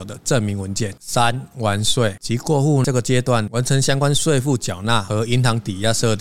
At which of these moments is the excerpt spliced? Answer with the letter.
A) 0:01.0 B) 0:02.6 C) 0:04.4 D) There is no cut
D